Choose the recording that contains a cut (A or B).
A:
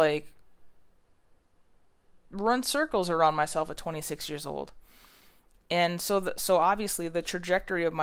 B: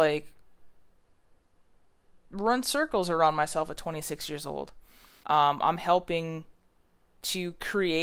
B